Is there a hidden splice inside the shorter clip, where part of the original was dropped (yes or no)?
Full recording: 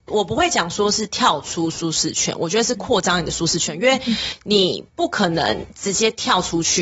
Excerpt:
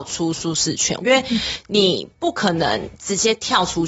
yes